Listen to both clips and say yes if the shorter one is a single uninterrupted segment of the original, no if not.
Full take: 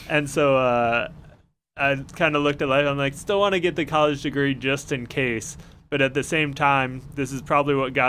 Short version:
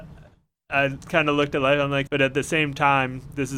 no